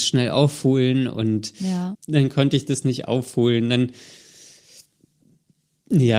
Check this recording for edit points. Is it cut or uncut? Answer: cut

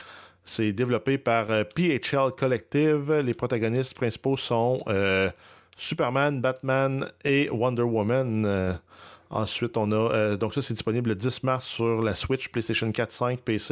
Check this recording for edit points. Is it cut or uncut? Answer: uncut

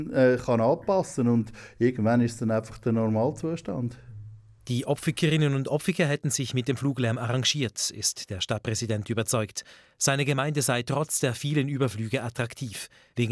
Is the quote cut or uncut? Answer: uncut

